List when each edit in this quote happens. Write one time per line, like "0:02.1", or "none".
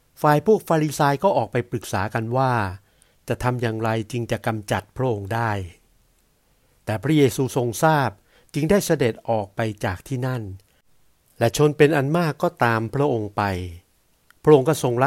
none